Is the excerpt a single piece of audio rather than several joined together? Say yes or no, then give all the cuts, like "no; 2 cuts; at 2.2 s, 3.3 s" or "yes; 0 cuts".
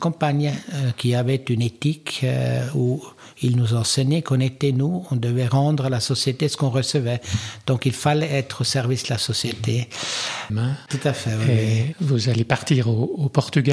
no; 1 cut; at 10.5 s